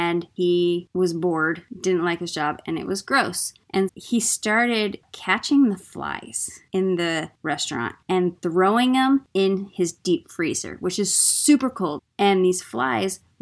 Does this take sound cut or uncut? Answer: cut